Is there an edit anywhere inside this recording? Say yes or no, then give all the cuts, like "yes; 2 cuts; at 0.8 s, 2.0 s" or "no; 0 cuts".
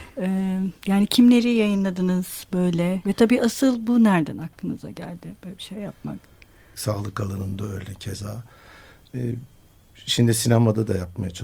yes; 2 cuts; at 3.0 s, 6.7 s